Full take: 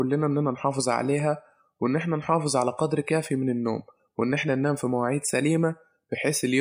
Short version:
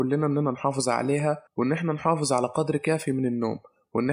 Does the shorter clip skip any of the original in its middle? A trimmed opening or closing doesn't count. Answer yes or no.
yes